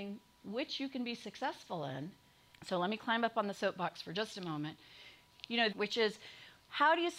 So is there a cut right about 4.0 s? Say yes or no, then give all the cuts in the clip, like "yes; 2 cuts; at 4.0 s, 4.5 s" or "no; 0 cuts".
no; 2 cuts; at 2.5 s, 5.7 s